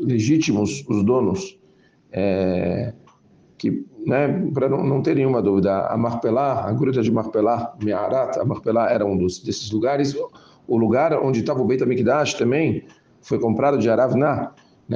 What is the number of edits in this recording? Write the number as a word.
zero